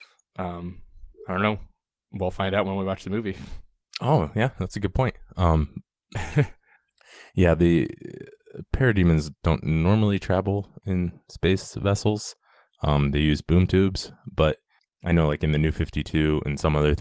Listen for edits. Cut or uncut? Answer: uncut